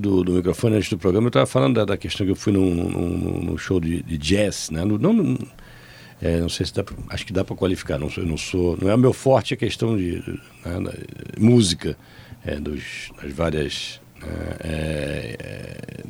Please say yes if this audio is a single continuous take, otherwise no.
yes